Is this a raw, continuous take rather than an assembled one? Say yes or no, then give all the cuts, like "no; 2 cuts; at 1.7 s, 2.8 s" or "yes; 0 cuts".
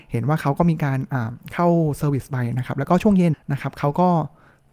no; 1 cut; at 3.3 s